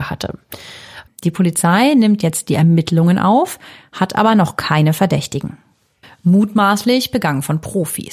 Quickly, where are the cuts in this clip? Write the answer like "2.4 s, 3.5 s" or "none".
1.1 s, 6.0 s